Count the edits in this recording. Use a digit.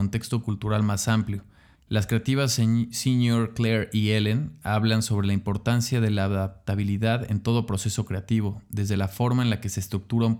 1